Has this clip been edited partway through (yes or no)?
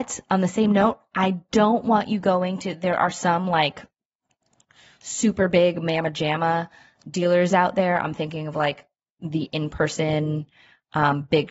no